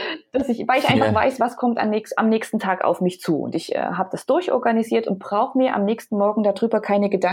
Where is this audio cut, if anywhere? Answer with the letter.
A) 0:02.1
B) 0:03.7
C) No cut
C